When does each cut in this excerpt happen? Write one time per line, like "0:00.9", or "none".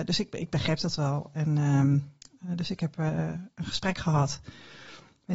none

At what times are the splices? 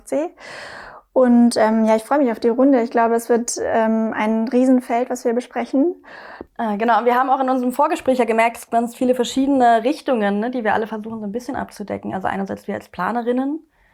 0:06.5

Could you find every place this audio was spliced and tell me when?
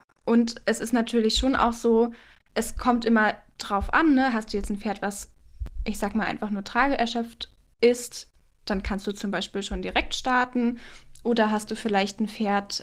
none

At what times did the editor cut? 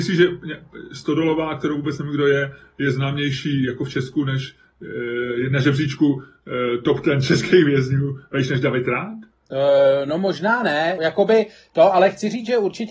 0:11.0

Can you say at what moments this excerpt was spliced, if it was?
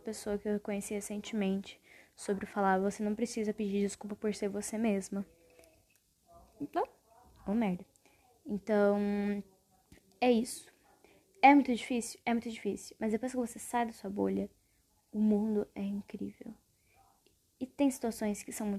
none

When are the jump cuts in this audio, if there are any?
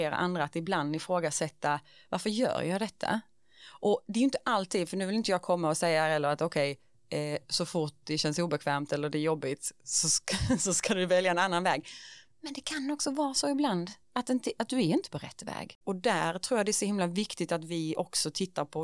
0:14.0
0:15.8

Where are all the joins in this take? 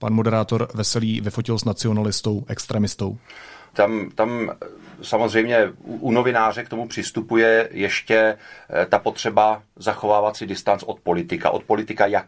0:03.7

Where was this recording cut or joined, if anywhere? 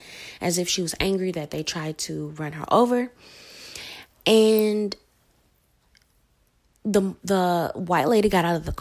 none

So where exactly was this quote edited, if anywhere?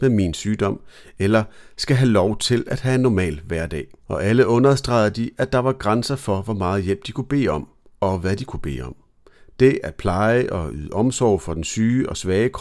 none

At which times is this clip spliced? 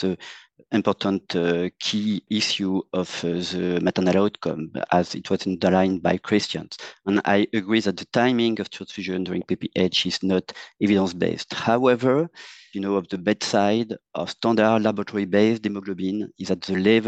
0:12.7

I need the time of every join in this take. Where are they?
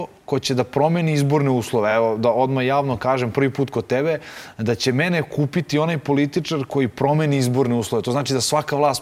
none

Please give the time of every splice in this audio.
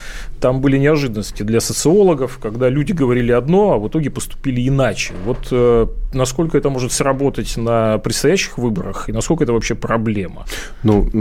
none

